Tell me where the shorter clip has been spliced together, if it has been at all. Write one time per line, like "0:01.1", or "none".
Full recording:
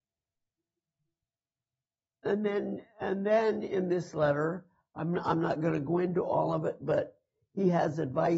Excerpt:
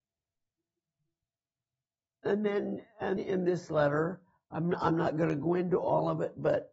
0:03.2